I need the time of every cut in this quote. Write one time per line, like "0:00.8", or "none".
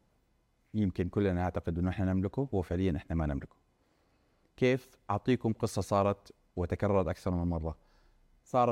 none